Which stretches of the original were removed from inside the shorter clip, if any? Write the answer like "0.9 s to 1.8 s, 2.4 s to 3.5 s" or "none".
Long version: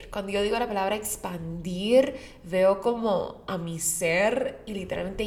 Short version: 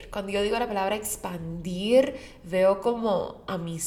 none